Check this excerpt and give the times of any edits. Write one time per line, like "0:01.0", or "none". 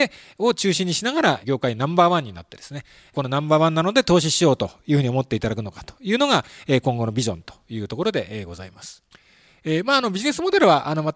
none